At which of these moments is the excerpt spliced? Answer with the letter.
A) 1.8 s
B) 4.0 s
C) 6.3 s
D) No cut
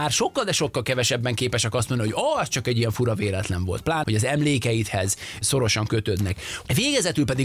B